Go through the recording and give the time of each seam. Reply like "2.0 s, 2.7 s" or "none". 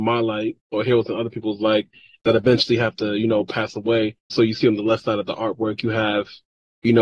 4.3 s

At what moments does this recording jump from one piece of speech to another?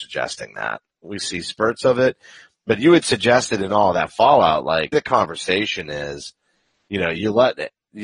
1.0 s, 4.9 s

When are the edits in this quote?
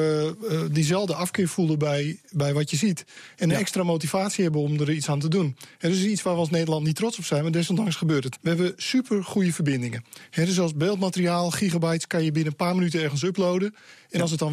8.4 s

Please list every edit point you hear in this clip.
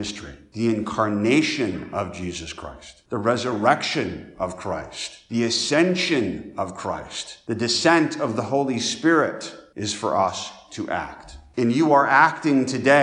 none

